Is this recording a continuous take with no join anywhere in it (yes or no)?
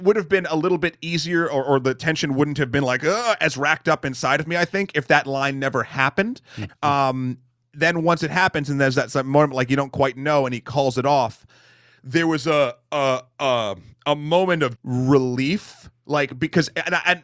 no